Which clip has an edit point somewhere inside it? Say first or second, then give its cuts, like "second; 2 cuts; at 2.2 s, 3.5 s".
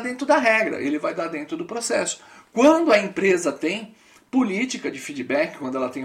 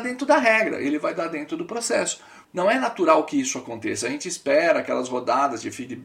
second; 1 cut; at 2.4 s